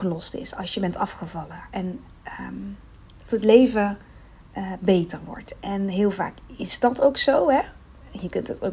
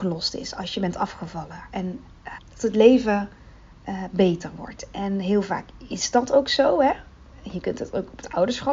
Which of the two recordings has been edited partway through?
second; 1 cut; at 2.4 s

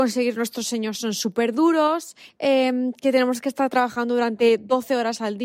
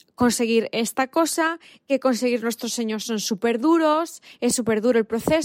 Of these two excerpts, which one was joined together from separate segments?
first; 1 cut; at 2.3 s

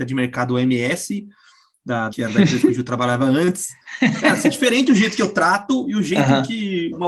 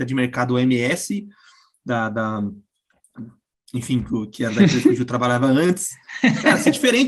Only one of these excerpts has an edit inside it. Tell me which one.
first; 1 cut; at 2.1 s

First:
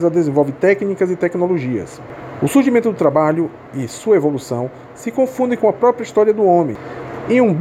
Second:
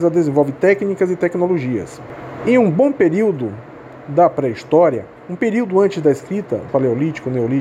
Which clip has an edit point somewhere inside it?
second; 3 cuts; at 2.4 s, 5.2 s, 6.7 s

